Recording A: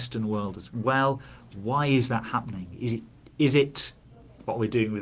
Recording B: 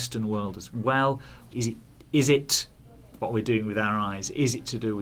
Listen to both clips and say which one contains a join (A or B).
B